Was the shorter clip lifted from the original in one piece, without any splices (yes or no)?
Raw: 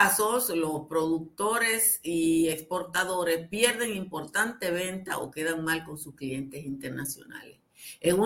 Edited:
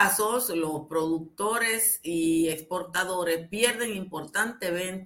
yes